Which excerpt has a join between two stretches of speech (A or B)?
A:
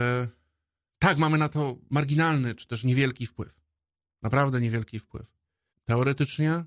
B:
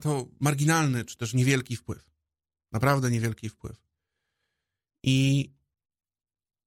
A